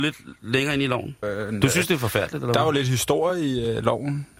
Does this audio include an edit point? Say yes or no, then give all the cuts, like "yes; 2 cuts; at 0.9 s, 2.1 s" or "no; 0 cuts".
yes; 1 cut; at 1.2 s